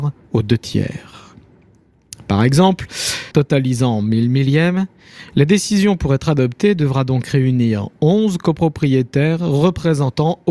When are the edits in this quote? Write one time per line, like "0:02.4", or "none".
0:03.3